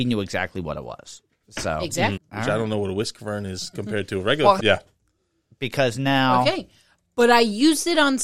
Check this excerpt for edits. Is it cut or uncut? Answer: cut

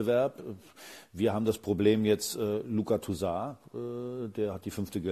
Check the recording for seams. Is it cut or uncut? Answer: uncut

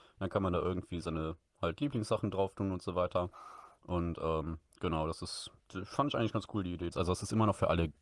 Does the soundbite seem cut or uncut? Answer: cut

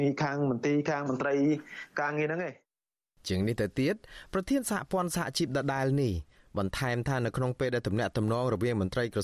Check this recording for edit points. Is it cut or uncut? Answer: uncut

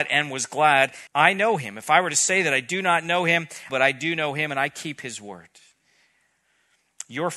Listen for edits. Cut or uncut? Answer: cut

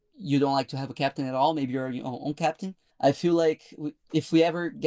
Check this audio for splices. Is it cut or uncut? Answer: cut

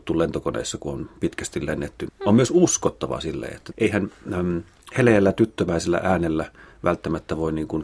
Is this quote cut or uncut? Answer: uncut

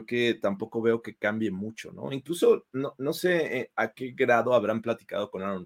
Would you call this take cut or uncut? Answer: uncut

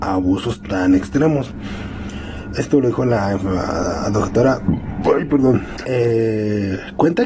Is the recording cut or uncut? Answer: cut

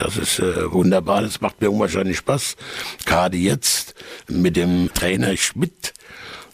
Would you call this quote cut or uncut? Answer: uncut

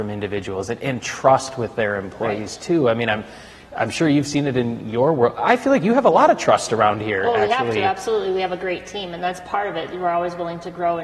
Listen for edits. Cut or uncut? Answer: uncut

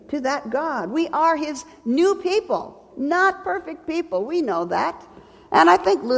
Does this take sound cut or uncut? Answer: cut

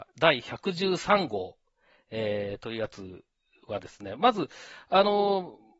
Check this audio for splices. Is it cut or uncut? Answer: uncut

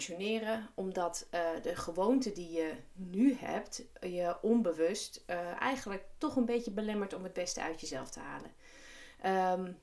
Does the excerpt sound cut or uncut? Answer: uncut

